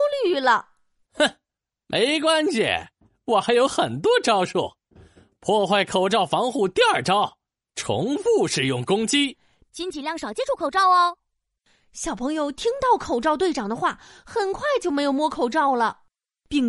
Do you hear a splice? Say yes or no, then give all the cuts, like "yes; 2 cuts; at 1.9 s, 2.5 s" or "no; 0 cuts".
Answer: yes; 1 cut; at 9.7 s